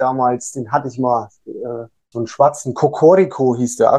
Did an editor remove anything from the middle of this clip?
yes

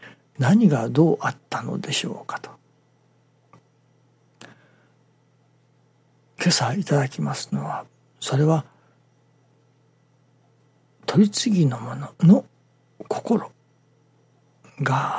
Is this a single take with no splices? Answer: no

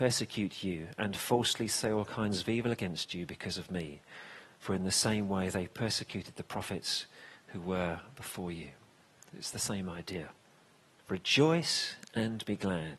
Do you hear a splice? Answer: yes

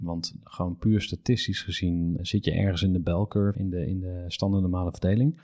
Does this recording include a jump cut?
yes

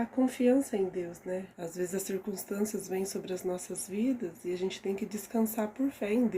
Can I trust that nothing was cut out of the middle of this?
no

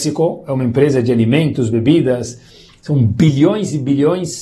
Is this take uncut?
yes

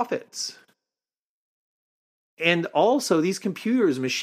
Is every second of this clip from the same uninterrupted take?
yes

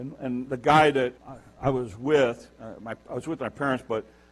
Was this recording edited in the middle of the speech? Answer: yes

